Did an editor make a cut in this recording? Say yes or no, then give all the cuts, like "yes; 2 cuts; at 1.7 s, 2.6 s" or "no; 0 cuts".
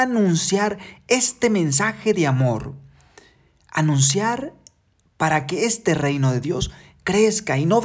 no; 0 cuts